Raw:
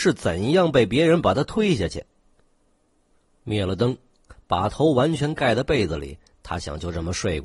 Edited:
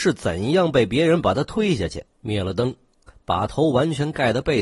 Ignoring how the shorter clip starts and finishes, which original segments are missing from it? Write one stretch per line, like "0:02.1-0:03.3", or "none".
0:02.1-0:03.3